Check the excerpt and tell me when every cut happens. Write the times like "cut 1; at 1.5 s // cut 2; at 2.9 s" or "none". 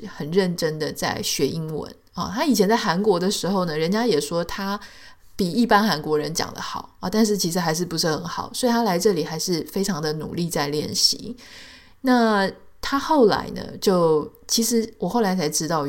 none